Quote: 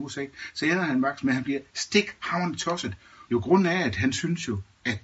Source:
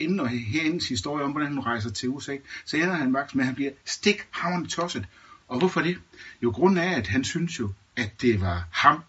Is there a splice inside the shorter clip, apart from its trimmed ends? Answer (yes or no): yes